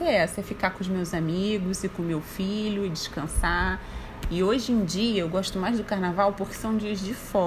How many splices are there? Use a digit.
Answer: 1